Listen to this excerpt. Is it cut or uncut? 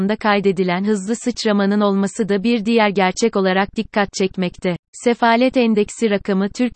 cut